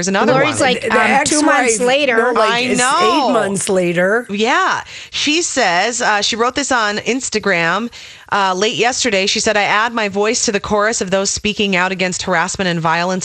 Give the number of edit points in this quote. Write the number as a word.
zero